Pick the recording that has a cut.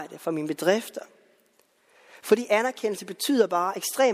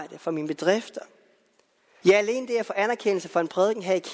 second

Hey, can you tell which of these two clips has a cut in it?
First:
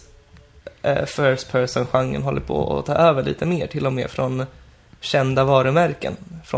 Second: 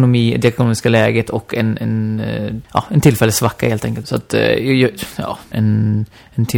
second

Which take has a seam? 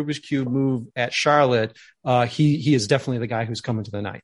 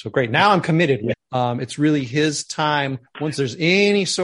second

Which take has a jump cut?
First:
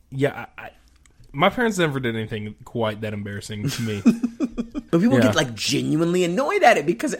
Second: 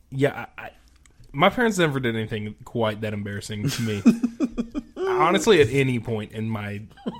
first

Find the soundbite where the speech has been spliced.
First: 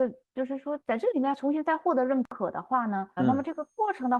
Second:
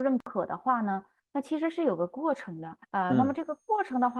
first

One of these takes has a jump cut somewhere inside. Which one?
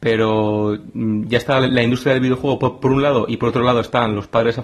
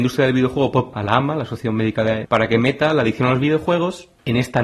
second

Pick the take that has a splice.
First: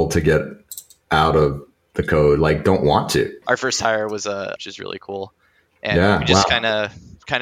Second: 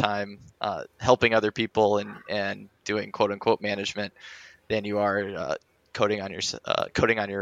first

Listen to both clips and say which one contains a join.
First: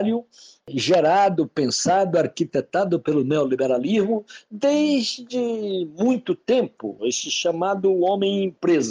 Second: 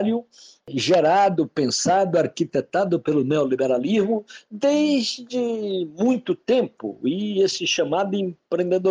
first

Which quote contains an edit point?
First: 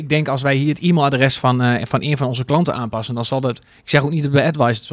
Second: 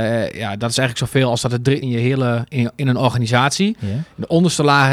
second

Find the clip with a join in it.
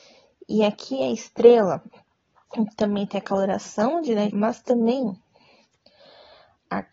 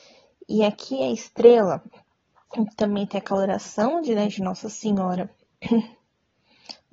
first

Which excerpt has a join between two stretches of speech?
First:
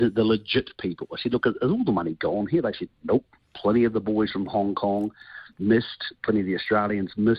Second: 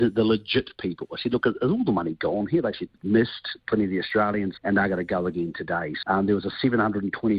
second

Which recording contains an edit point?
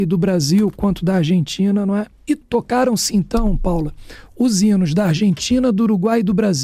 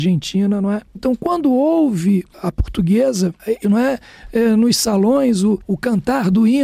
second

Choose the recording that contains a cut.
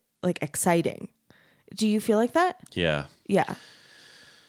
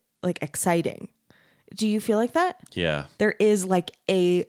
second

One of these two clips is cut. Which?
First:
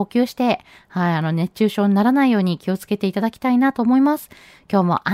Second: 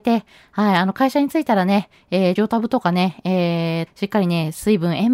second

